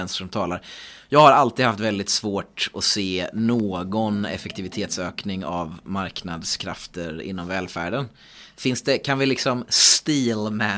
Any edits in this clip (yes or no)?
no